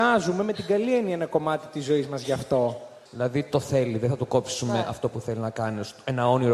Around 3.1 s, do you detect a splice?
yes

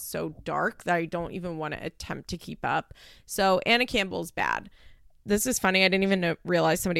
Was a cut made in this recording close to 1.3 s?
no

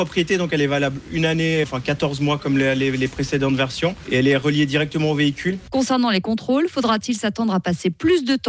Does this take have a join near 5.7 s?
no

